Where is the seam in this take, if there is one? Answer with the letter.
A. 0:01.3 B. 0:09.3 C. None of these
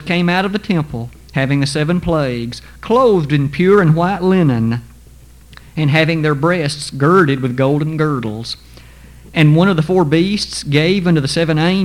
C